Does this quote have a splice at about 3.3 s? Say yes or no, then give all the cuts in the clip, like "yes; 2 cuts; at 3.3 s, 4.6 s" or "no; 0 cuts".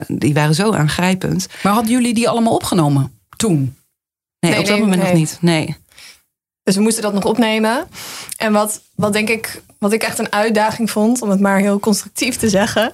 yes; 1 cut; at 3.3 s